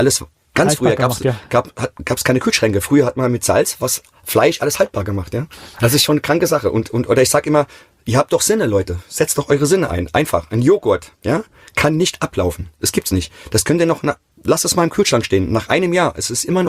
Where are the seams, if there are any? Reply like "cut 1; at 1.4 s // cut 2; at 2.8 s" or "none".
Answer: none